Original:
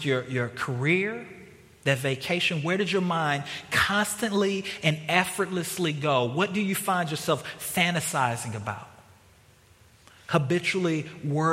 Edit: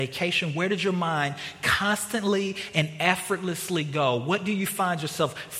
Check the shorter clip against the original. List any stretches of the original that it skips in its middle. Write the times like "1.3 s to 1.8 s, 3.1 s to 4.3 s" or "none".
none